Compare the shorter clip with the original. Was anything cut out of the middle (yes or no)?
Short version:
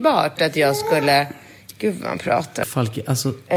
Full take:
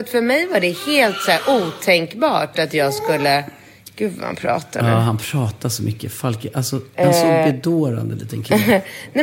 yes